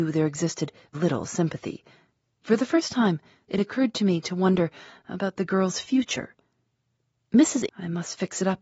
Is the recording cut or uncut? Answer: cut